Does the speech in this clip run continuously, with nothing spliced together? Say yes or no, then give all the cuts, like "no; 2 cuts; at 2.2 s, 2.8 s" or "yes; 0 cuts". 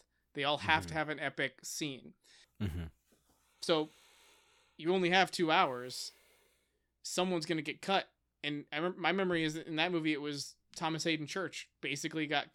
no; 1 cut; at 2.4 s